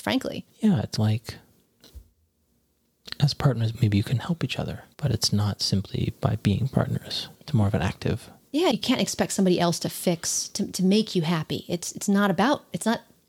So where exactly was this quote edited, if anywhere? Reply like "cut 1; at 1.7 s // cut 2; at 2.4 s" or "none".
none